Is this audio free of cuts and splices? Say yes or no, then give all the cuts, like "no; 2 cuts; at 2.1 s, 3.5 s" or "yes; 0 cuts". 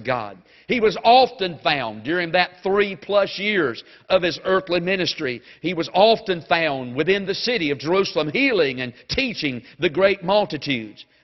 yes; 0 cuts